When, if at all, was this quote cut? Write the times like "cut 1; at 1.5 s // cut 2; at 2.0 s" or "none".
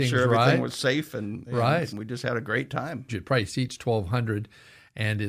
cut 1; at 1.9 s // cut 2; at 3.1 s